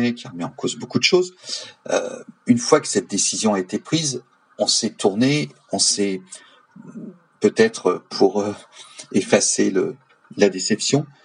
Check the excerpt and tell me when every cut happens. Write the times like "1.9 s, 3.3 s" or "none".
none